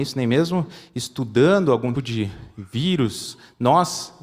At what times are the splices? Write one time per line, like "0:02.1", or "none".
0:01.9